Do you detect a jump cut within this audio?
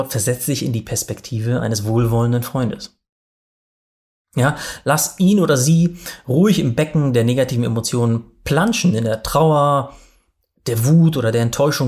no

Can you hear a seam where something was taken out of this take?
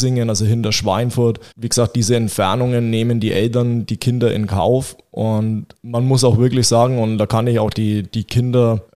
yes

